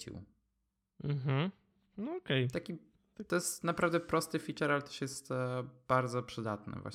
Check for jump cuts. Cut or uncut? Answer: uncut